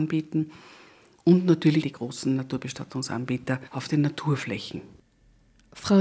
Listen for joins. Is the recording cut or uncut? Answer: cut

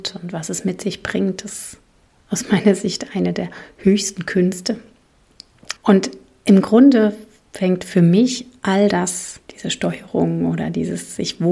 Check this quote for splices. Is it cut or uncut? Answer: cut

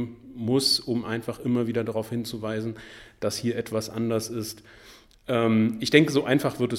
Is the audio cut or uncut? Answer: uncut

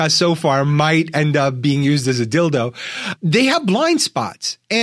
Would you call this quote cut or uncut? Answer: cut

